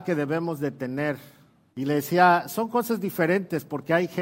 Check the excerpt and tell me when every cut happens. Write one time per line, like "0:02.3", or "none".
0:01.7